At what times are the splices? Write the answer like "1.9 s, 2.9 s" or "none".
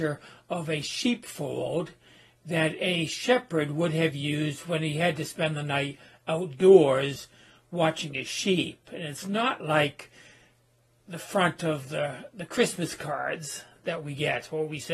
none